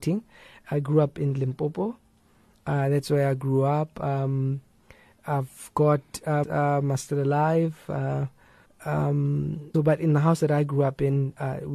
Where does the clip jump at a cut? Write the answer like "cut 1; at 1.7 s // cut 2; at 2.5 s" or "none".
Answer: cut 1; at 6.4 s // cut 2; at 8.7 s // cut 3; at 9.7 s